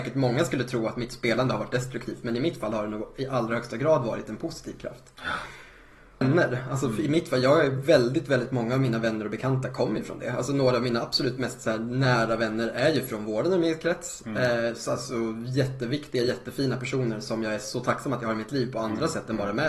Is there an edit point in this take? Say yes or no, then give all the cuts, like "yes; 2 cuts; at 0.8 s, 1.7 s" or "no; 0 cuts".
yes; 1 cut; at 6.2 s